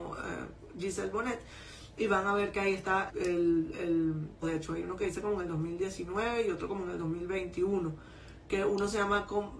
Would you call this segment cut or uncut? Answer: cut